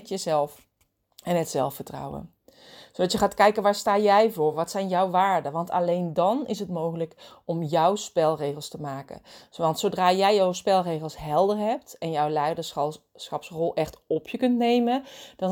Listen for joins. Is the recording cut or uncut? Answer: uncut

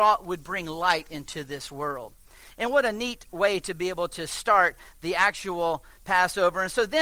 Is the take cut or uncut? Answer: uncut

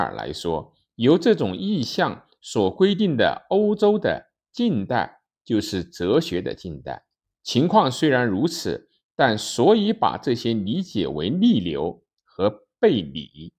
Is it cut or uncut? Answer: cut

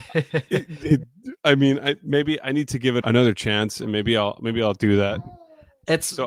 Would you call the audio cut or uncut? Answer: cut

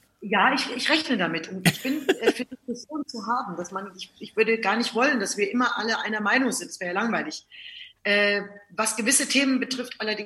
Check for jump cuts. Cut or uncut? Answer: uncut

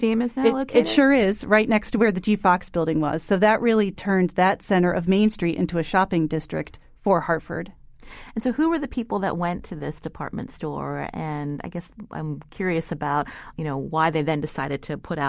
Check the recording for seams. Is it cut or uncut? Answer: cut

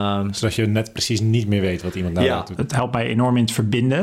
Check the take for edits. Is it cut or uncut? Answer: cut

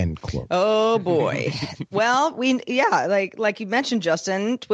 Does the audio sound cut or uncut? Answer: uncut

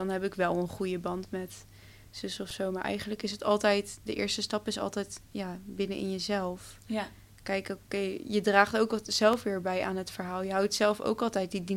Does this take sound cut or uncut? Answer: uncut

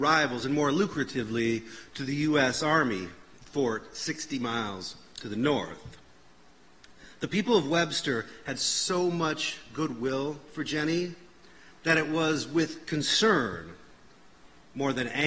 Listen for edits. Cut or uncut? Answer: uncut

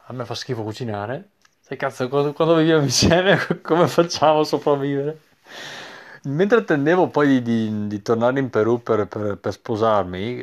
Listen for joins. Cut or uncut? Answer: cut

